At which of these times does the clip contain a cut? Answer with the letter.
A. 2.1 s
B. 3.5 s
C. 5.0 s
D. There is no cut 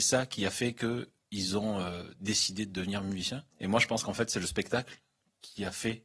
B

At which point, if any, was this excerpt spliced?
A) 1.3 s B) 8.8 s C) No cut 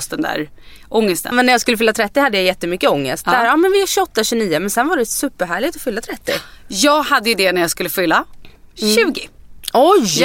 A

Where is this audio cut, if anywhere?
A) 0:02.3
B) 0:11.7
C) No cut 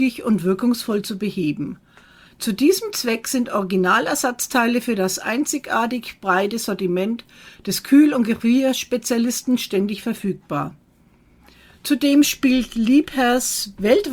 A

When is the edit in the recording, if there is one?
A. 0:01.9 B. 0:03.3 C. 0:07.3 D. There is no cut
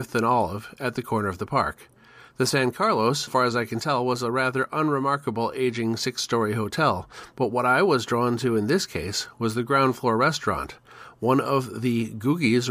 B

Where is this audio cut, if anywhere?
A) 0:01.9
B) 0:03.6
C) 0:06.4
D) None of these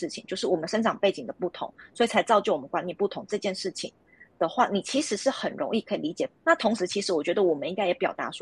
C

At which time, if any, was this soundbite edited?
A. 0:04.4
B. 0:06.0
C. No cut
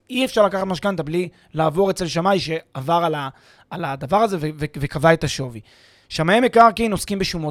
B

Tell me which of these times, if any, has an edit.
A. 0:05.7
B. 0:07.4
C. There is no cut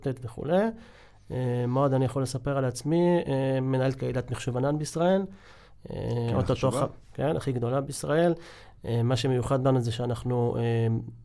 B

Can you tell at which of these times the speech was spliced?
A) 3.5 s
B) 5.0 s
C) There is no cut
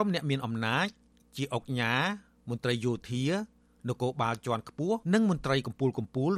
B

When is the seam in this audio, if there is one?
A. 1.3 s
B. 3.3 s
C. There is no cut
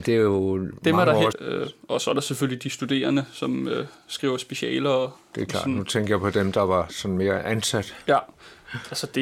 A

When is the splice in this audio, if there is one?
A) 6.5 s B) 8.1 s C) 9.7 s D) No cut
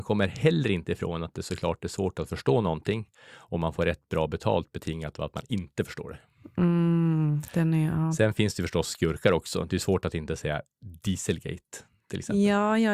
D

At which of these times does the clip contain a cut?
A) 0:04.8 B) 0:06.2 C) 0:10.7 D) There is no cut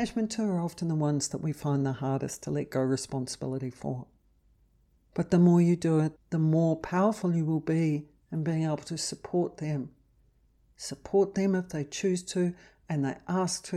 B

